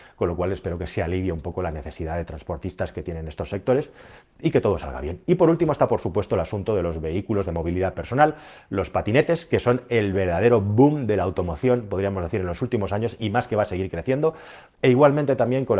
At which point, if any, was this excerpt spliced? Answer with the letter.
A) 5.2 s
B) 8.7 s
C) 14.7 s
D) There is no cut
C